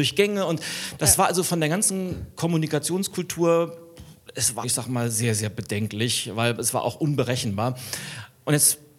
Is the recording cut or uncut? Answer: cut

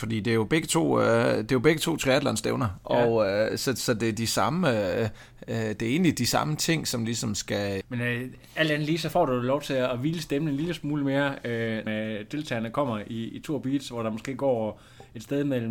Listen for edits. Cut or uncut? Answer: cut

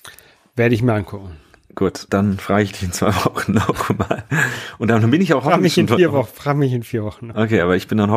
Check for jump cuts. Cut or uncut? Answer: cut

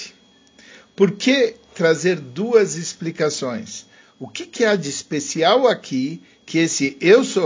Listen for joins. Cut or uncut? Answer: cut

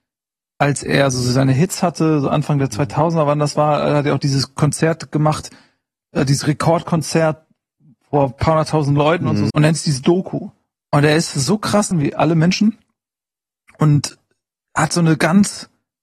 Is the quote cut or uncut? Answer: cut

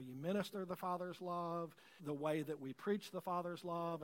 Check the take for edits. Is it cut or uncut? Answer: cut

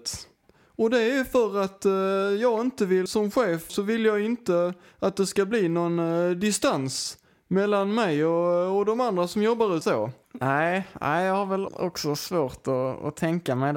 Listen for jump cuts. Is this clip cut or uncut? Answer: cut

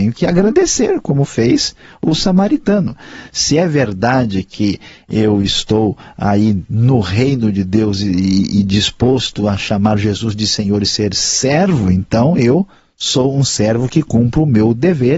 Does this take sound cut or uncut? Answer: uncut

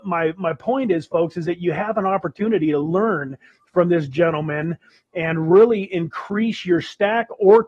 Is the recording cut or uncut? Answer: uncut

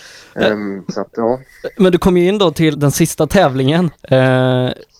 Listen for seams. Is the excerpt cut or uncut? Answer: cut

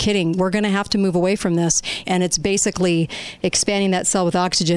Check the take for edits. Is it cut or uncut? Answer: cut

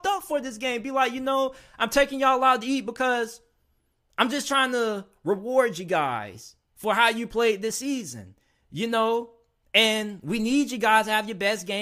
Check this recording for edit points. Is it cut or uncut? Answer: uncut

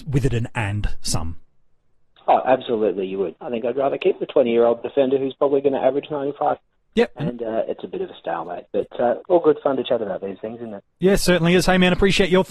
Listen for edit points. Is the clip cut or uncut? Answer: cut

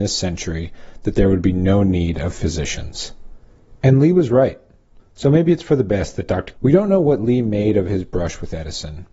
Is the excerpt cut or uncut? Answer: cut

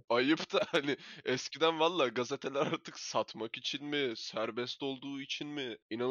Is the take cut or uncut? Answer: uncut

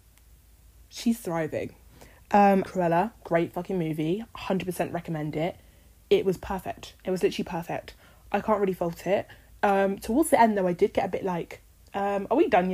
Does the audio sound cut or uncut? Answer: cut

